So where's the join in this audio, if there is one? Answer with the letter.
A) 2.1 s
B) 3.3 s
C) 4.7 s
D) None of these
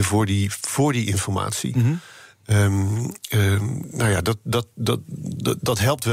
D